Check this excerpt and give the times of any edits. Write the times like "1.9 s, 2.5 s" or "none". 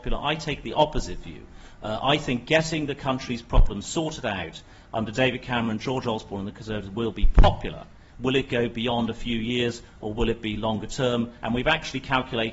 8.1 s, 11.4 s